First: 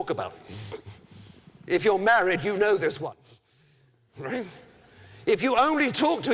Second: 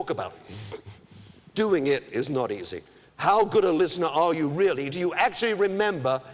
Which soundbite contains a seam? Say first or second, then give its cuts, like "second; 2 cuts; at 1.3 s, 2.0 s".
second; 2 cuts; at 1.5 s, 3.1 s